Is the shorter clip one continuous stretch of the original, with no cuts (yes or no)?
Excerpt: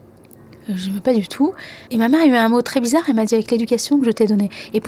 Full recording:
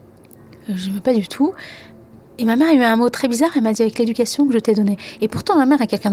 no